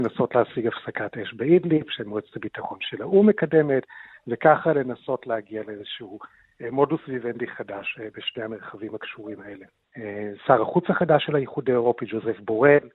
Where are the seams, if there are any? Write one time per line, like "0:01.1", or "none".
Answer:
0:09.8